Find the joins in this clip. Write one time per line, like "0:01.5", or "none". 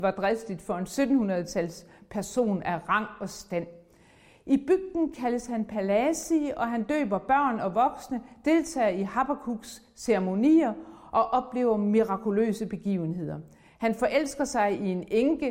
none